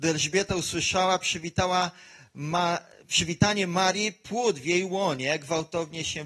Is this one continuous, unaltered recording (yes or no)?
yes